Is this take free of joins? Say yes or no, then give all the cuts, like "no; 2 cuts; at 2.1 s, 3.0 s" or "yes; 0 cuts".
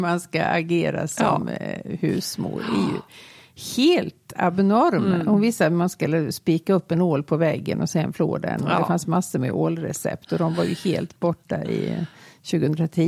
yes; 0 cuts